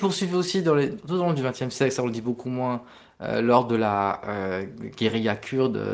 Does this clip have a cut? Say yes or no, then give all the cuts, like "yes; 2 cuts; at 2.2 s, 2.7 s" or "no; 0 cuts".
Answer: no; 0 cuts